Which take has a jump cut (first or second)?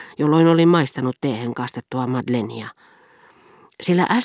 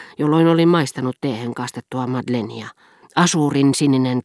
second